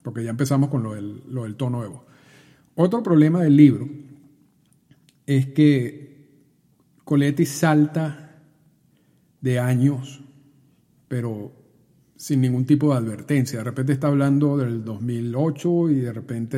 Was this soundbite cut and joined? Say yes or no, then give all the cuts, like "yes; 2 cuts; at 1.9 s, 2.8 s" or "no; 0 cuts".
no; 0 cuts